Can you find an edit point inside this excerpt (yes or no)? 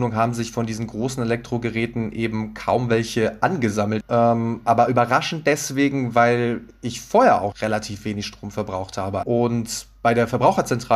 yes